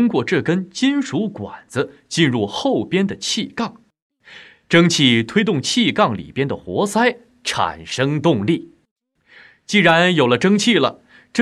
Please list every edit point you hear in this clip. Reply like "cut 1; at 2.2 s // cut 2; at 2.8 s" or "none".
none

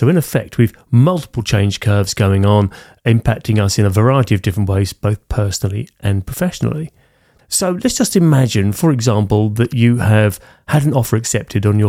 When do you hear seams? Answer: cut 1; at 7.4 s

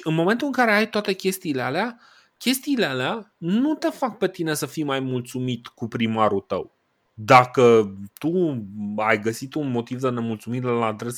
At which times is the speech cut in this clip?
none

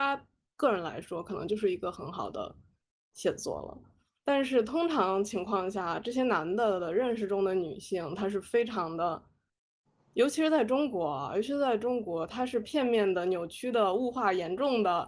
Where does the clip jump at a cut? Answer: none

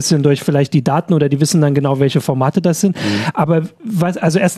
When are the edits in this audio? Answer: none

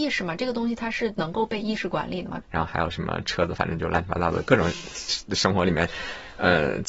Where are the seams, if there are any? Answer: cut 1; at 2.4 s // cut 2; at 3.6 s

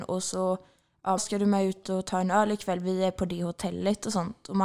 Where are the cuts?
cut 1; at 1.2 s

